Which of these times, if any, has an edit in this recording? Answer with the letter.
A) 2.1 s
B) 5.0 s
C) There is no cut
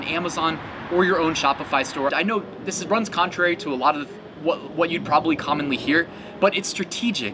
A